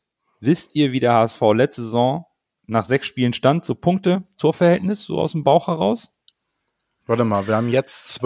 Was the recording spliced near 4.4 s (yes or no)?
yes